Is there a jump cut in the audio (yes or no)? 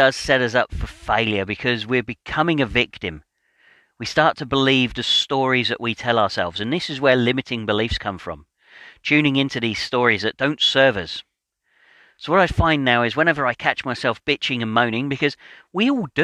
no